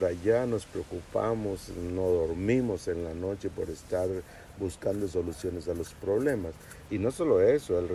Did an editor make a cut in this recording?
yes; 1 cut; at 6.9 s

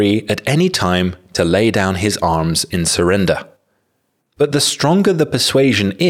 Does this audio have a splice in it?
yes; 1 cut; at 4.2 s

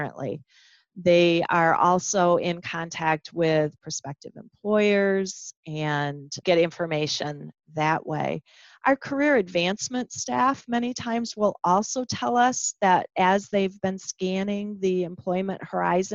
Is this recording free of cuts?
yes; 0 cuts

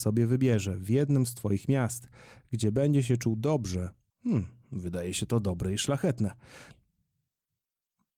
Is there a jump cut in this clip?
yes; 2 cuts; at 4.1 s, 6.7 s

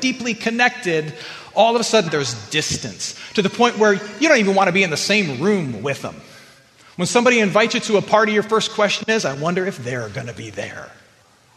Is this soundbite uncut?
no; 1 cut; at 2.1 s

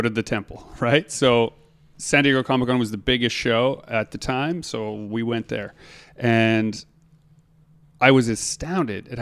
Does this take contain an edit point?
no; 0 cuts

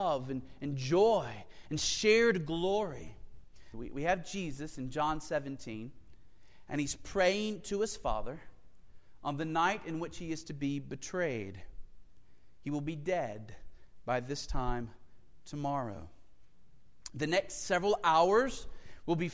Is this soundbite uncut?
no; 1 cut; at 3.7 s

